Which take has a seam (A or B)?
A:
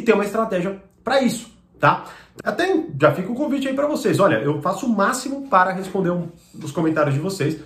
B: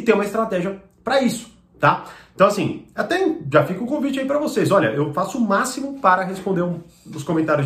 A